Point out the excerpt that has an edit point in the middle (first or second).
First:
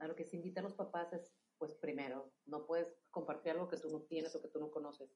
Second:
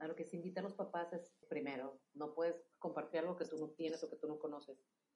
second